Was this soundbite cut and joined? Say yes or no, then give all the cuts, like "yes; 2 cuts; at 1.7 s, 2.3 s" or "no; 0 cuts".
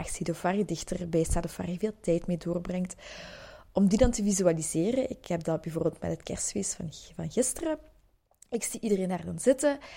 no; 0 cuts